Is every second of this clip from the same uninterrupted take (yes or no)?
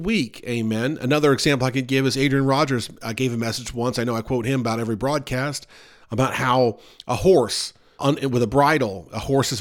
no